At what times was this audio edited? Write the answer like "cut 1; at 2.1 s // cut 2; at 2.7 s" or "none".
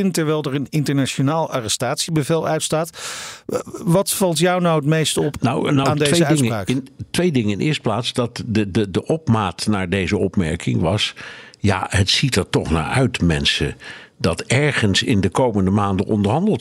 none